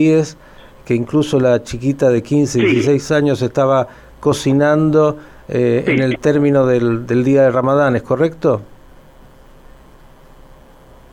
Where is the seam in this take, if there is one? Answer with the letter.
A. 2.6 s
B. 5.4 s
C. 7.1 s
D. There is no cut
D